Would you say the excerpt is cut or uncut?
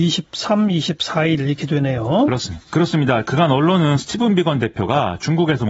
cut